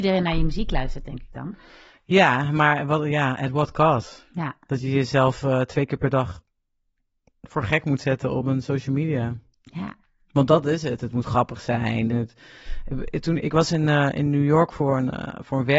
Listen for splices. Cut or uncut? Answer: cut